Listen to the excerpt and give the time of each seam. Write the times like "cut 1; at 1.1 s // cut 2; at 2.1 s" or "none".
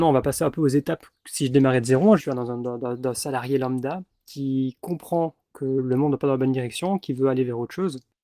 cut 1; at 2.2 s